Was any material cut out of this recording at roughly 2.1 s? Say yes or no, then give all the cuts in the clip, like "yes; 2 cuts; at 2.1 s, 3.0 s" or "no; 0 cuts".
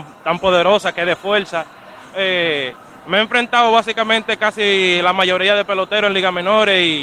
yes; 1 cut; at 2.1 s